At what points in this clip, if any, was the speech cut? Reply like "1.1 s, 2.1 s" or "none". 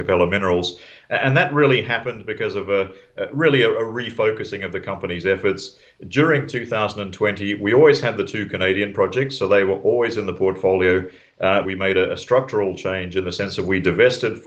11.6 s